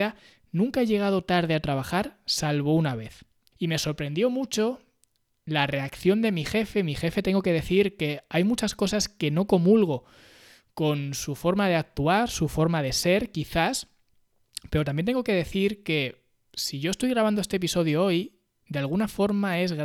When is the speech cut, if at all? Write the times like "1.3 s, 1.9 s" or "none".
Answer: 3.5 s